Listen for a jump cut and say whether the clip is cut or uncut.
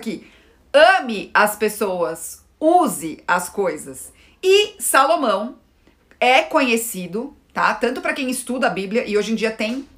uncut